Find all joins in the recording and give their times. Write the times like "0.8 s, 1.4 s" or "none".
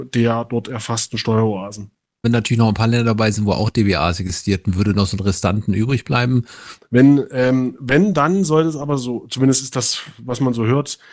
2.2 s, 6.8 s